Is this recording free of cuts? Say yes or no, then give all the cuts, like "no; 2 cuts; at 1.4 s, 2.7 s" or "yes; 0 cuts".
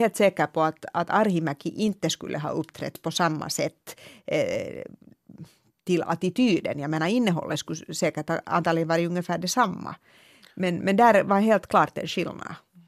yes; 0 cuts